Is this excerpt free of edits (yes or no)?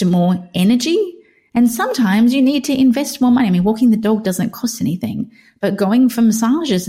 yes